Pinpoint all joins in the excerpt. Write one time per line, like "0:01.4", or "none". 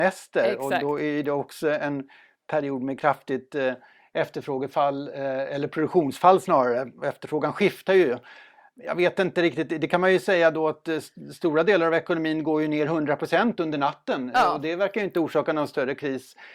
none